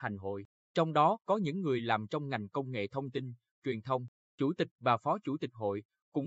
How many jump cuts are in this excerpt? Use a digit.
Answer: 1